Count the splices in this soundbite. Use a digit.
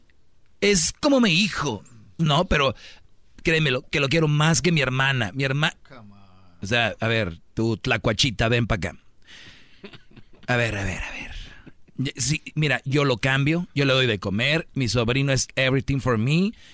2